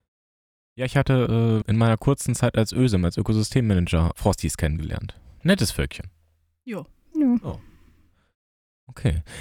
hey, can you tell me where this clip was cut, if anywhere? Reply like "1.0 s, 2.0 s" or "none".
1.6 s, 4.1 s